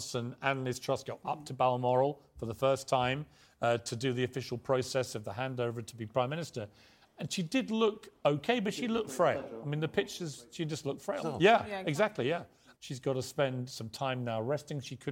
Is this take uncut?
no; 2 cuts; at 11.2 s, 12.7 s

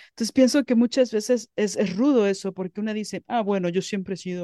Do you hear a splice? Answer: no; 0 cuts

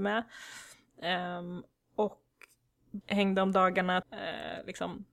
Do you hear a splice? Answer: yes; 2 cuts; at 3.0 s, 4.0 s

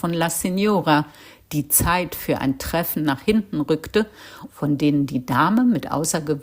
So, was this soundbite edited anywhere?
yes; 1 cut; at 4.5 s

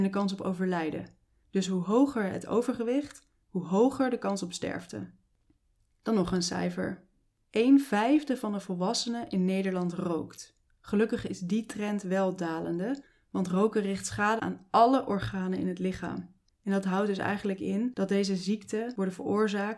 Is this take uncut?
no; 2 cuts; at 14.4 s, 16.5 s

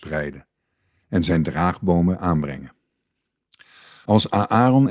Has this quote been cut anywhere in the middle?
no; 0 cuts

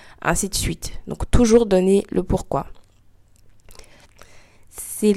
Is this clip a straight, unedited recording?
no; 1 cut; at 4.1 s

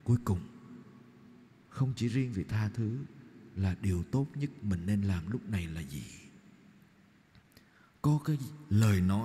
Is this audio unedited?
yes; 0 cuts

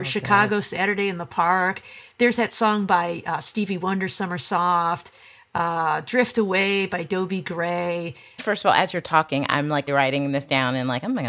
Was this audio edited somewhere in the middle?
yes; 2 cuts; at 8.4 s, 9.9 s

